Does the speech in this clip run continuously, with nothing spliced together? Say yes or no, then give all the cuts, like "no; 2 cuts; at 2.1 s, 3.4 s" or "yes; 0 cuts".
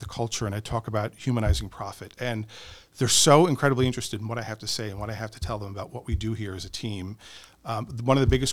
yes; 0 cuts